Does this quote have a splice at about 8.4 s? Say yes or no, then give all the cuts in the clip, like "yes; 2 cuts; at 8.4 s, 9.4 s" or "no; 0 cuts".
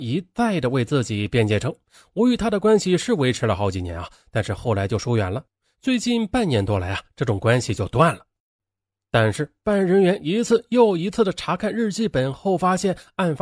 no; 0 cuts